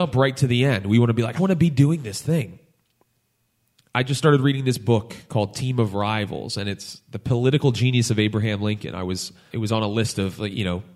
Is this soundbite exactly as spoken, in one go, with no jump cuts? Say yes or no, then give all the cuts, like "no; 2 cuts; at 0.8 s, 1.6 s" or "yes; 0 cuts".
no; 2 cuts; at 1.4 s, 9.5 s